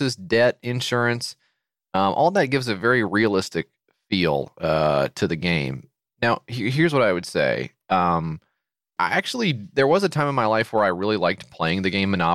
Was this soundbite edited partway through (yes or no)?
yes